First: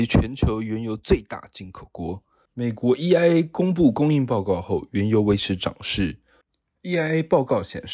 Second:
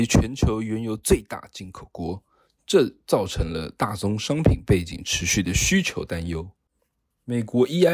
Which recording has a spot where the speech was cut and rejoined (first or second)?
first